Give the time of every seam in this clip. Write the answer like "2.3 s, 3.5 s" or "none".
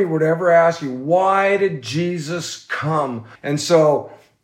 3.3 s